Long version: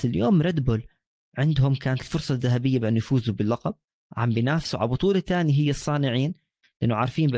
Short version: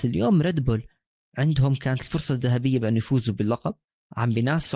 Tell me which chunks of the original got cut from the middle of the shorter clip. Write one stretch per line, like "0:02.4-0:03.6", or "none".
none